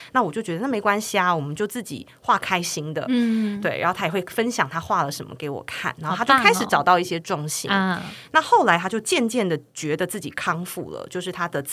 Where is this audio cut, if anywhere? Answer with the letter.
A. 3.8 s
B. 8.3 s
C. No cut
C